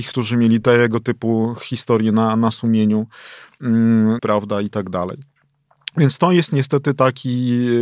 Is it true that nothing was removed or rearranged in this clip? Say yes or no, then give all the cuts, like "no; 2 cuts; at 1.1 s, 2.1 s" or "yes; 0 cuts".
no; 1 cut; at 4.2 s